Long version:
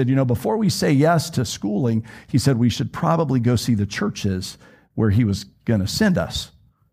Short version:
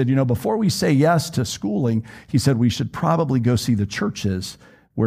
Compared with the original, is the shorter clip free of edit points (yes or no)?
yes